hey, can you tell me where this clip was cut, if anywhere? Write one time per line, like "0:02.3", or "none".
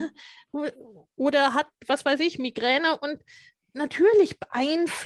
none